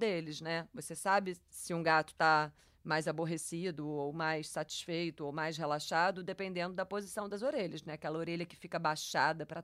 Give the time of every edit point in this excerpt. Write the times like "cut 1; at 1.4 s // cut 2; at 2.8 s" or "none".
none

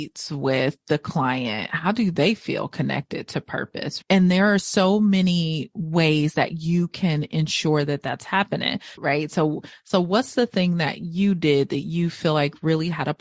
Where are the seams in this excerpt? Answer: cut 1; at 4.0 s // cut 2; at 9.0 s

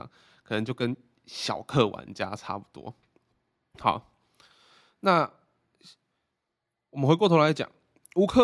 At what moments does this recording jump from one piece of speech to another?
none

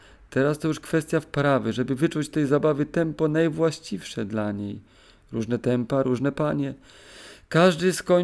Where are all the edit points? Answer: none

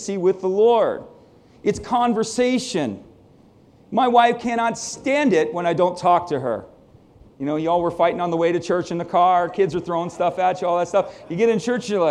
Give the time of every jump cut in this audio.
cut 1; at 7.3 s

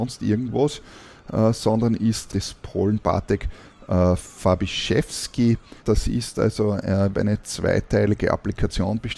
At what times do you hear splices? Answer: cut 1; at 2.3 s // cut 2; at 5.8 s // cut 3; at 7.1 s

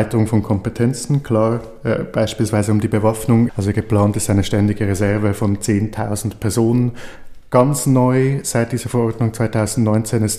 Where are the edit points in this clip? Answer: cut 1; at 3.5 s

